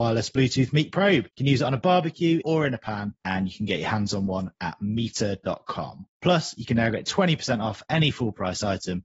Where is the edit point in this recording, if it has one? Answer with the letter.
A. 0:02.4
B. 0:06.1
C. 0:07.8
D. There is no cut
A